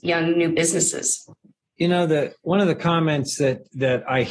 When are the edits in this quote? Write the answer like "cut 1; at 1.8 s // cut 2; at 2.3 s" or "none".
none